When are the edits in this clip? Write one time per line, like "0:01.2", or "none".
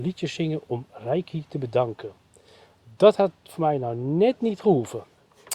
none